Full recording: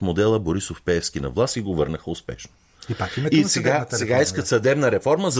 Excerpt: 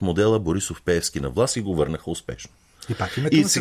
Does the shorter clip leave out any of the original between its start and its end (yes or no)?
no